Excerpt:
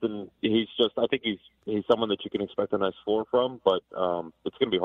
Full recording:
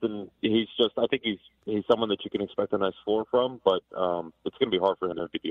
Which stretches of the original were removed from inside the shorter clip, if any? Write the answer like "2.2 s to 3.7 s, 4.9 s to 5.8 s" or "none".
none